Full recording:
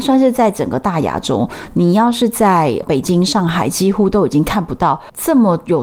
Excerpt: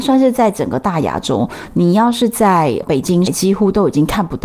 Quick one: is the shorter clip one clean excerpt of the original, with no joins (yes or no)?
no